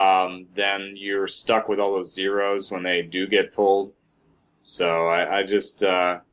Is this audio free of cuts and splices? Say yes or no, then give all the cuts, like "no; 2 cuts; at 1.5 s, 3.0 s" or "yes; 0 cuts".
yes; 0 cuts